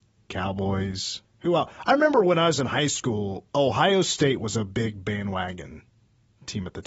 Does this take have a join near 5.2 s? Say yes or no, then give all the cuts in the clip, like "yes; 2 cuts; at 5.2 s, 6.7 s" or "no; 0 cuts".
no; 2 cuts; at 1.2 s, 3.5 s